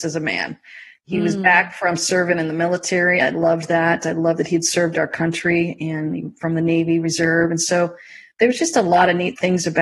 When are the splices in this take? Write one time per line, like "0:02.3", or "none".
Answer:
none